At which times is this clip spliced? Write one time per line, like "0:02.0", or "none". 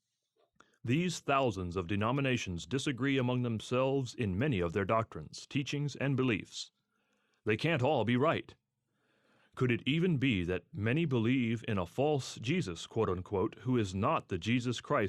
none

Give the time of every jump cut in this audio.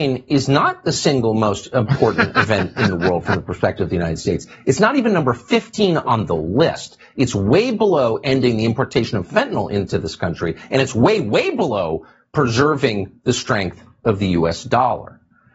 none

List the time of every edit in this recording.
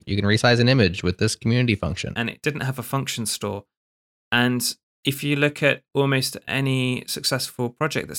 0:02.1

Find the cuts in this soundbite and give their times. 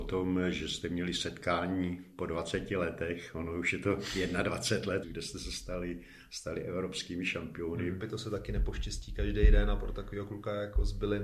0:05.0
0:08.0

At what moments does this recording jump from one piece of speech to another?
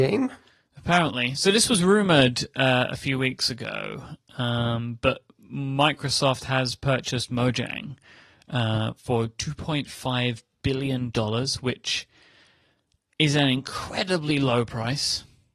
none

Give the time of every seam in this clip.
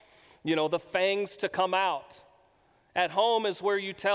none

